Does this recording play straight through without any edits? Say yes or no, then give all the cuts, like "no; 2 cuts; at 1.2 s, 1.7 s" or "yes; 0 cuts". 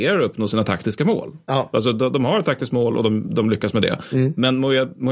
yes; 0 cuts